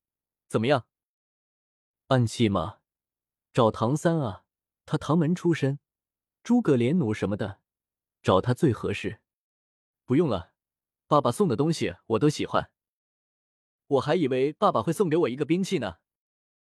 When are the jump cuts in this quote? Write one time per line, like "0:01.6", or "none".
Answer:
0:13.8